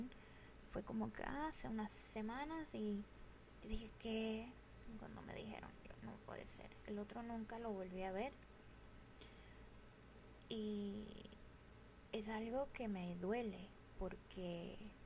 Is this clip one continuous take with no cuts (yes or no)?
yes